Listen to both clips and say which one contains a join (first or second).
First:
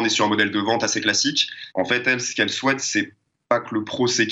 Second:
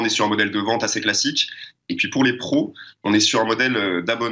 first